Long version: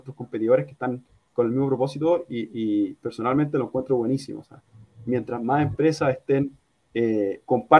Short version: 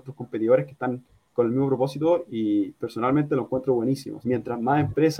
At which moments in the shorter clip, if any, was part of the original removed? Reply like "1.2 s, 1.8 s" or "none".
2.3 s, 4.2 s

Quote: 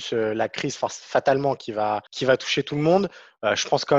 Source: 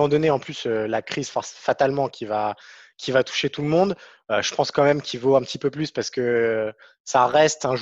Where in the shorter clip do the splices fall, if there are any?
2.1 s

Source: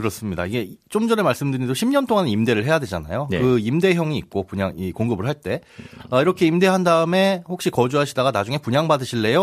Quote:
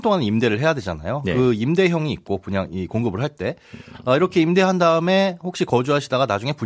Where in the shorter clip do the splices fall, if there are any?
none

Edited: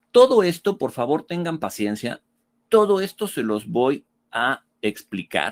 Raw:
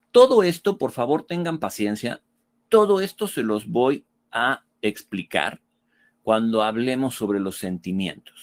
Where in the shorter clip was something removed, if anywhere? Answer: none

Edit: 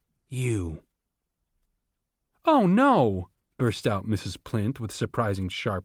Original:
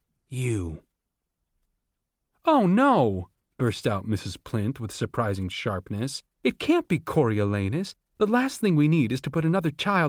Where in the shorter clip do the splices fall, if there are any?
none

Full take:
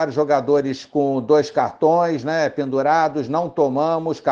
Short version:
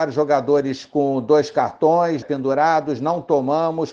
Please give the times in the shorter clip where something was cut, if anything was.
2.2 s

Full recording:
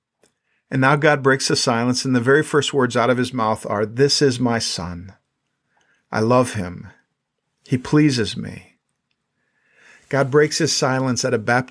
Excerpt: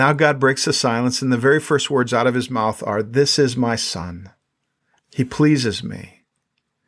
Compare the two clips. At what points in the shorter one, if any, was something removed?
5.0 s

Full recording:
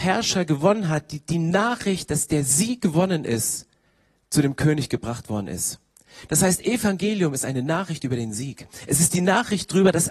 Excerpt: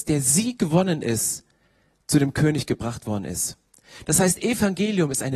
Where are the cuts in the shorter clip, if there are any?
none

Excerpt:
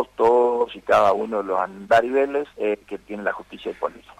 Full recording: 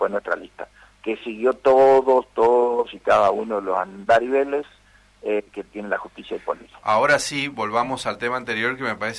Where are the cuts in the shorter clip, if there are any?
2.5 s

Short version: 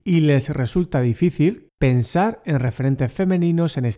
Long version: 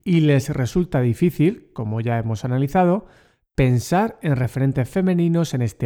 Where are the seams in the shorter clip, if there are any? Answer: 1.7 s

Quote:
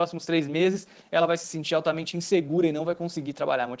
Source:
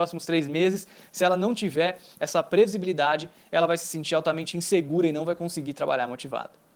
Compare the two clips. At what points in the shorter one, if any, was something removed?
1.0 s

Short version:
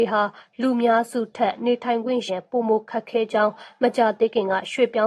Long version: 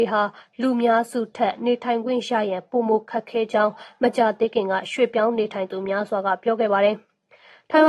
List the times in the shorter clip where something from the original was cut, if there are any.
2.3 s

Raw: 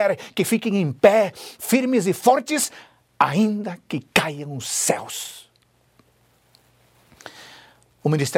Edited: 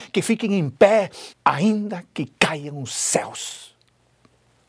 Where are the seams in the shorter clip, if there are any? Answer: 1.3 s

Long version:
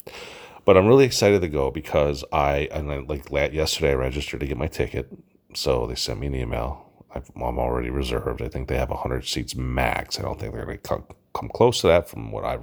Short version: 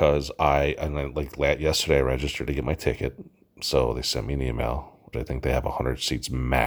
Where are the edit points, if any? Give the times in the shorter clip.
5.1 s

